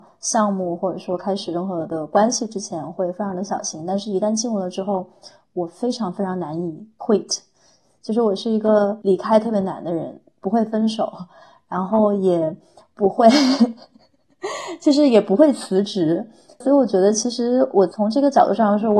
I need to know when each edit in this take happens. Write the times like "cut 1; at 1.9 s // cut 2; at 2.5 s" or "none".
none